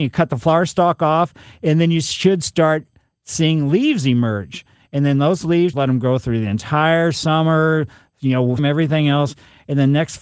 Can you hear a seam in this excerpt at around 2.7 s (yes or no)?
no